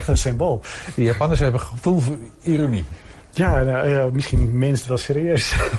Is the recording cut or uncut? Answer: uncut